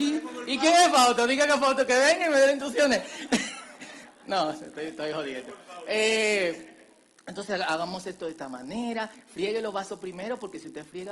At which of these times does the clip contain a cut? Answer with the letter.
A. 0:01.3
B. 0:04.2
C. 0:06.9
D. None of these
D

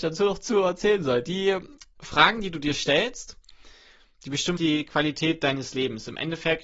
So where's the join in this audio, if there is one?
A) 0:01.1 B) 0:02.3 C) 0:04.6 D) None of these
C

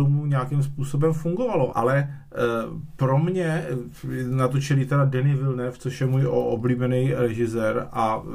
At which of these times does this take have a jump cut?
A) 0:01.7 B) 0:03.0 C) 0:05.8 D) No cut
A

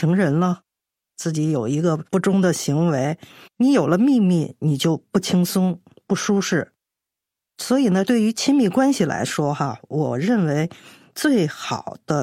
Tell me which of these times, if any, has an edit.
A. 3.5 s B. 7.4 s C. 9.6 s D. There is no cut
A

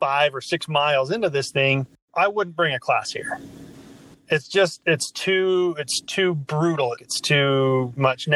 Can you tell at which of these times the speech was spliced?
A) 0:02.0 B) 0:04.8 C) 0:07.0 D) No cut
C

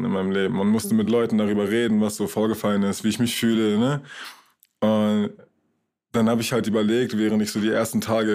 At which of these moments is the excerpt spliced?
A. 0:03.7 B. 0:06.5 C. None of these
C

